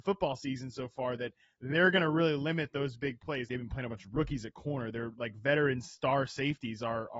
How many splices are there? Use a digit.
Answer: 1